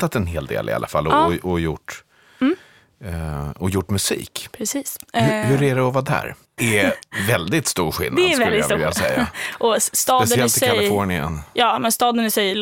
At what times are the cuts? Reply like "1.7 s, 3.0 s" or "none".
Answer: 6.6 s

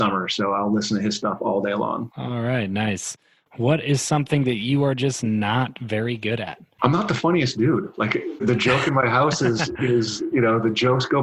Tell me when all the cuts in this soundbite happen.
none

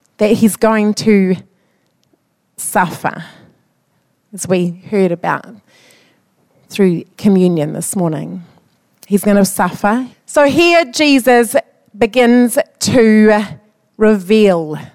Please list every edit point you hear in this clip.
10.1 s

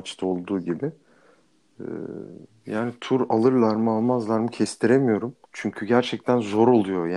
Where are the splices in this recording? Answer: 5.4 s

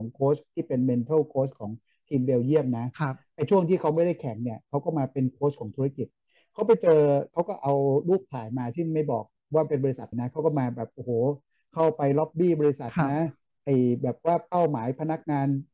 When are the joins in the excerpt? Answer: 10.1 s

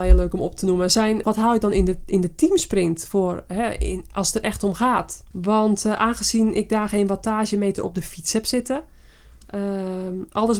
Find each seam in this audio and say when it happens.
1.2 s, 5.3 s

